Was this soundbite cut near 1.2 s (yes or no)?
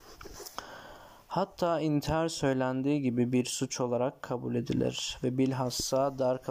no